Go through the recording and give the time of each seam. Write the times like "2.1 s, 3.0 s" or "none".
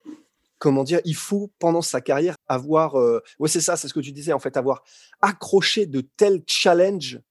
2.3 s